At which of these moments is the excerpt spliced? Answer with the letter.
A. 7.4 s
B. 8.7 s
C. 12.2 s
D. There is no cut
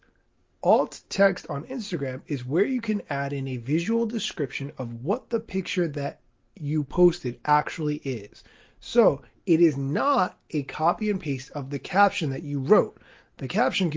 D